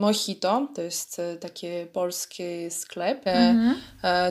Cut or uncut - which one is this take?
cut